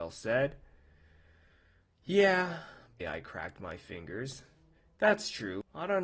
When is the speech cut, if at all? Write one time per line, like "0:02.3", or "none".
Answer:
0:03.0